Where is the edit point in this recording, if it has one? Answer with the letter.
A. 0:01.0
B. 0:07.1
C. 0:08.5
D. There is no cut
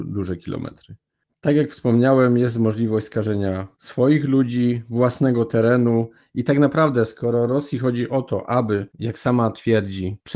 D